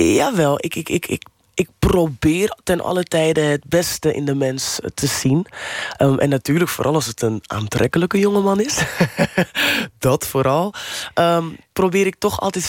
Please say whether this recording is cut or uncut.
uncut